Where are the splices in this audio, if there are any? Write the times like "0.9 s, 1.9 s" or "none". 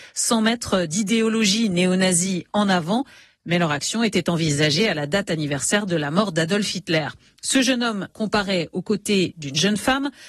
8.1 s